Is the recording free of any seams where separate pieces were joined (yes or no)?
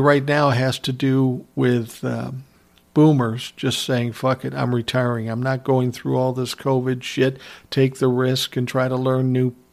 yes